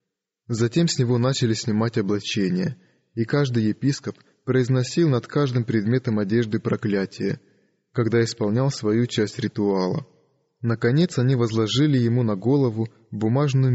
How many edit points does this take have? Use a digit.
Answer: 0